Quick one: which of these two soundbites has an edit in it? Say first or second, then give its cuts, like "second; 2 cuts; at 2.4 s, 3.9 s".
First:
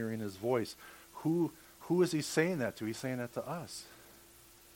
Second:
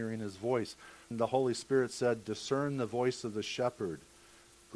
second; 1 cut; at 1.1 s